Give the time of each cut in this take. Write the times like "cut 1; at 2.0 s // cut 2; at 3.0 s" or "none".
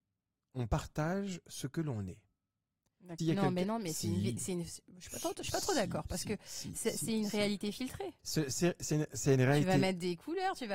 cut 1; at 3.2 s // cut 2; at 8.2 s